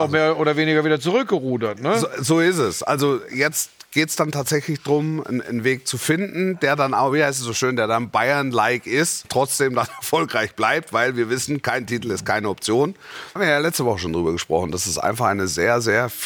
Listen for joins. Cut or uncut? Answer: cut